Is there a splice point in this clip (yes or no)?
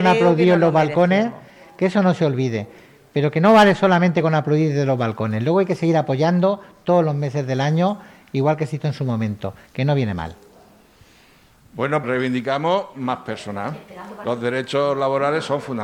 yes